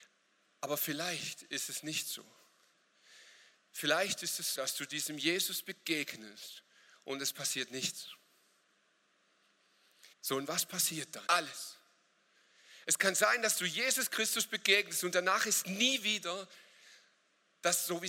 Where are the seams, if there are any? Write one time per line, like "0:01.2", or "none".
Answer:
0:04.5
0:10.1
0:11.3